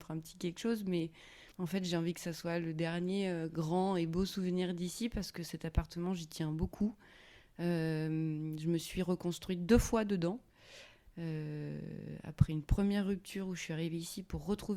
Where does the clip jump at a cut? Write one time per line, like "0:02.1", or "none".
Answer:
0:01.5